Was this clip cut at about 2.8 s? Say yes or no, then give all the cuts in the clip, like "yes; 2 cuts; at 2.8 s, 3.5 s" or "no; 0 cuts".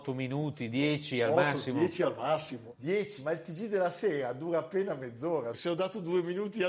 no; 1 cut; at 5.5 s